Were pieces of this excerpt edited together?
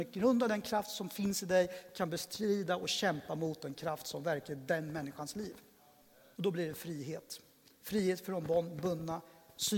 yes; 1 cut; at 6.3 s

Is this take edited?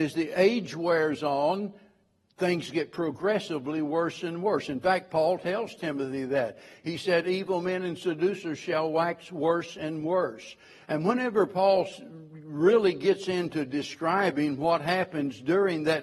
no; 0 cuts

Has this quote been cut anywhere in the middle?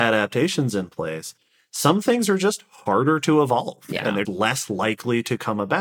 yes; 1 cut; at 4.3 s

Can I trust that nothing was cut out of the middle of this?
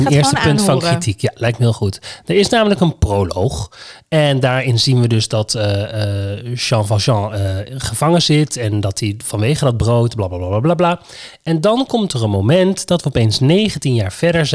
yes; 0 cuts

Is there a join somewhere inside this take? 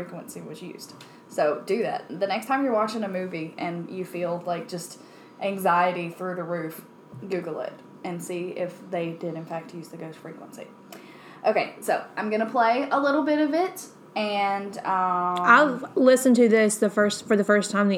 no; 0 cuts

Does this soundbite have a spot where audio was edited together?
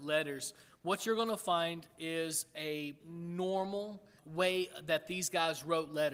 yes; 2 cuts; at 3.0 s, 4.2 s

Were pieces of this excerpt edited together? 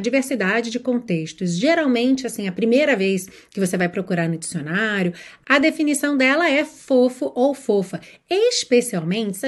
no; 0 cuts

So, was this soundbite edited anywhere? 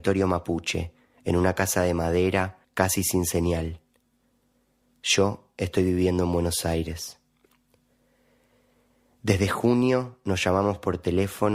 yes; 1 cut; at 2.6 s

